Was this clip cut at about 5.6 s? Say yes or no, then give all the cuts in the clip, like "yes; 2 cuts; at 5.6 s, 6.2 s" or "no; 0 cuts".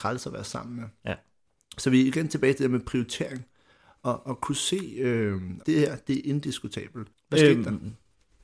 yes; 2 cuts; at 5.6 s, 7.1 s